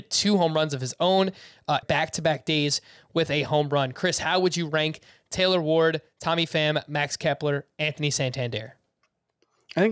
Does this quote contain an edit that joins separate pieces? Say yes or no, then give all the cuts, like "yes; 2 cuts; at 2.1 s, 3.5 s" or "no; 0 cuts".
yes; 1 cut; at 1.8 s